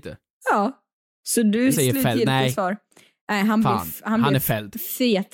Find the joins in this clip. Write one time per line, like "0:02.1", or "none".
0:01.7